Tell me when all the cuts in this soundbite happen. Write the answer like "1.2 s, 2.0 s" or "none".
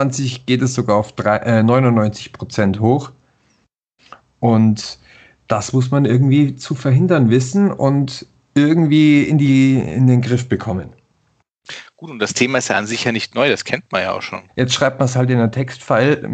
14.5 s